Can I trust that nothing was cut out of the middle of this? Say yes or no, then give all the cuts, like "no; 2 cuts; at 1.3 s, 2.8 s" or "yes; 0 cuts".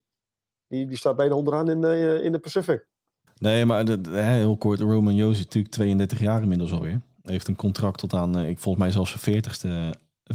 no; 1 cut; at 3.3 s